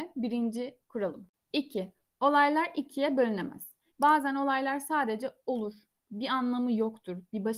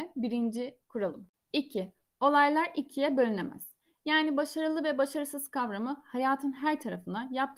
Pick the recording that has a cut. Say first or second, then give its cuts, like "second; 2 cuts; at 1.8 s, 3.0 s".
first; 1 cut; at 3.9 s